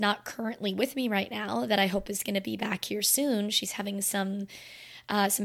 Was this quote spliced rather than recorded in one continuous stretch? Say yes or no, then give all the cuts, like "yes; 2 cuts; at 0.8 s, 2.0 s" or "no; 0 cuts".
no; 0 cuts